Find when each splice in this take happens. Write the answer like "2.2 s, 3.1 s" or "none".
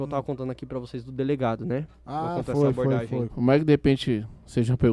3.3 s